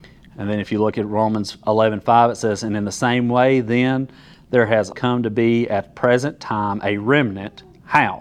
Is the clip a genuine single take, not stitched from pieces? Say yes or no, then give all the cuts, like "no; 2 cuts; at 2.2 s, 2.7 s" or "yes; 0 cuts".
no; 1 cut; at 4.9 s